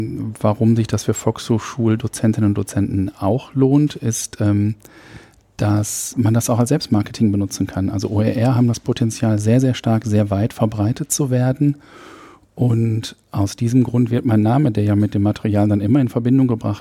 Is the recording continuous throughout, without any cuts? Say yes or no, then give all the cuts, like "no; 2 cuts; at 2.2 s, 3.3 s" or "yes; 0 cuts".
yes; 0 cuts